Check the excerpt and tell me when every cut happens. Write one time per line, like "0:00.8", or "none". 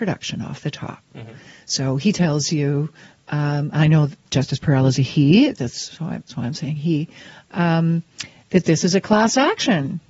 none